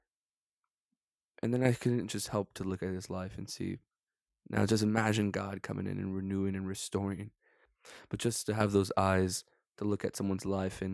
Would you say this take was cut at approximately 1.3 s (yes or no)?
no